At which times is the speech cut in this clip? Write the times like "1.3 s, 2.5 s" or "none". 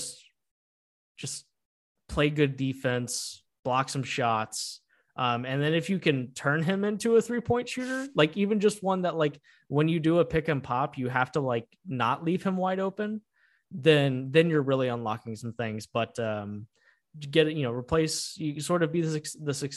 none